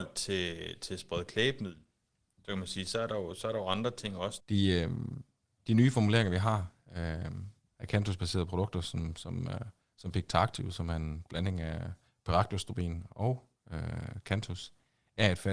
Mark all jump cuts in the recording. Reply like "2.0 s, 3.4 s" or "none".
4.4 s